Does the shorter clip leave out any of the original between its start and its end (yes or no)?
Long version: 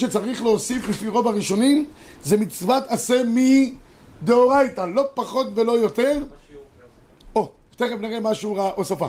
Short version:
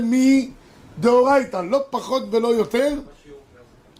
no